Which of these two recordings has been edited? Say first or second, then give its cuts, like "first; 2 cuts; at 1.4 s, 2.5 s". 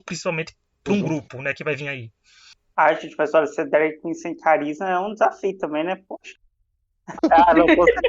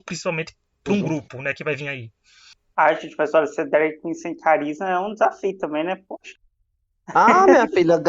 first; 1 cut; at 7.2 s